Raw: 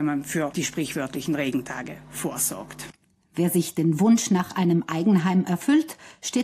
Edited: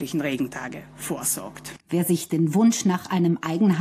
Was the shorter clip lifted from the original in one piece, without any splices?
no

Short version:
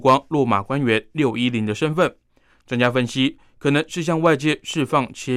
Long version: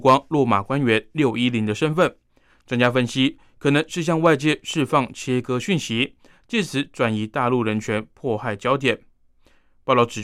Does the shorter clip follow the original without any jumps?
yes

